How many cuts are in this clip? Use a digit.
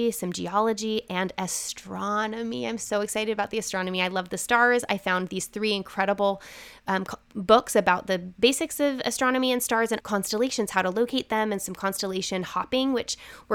1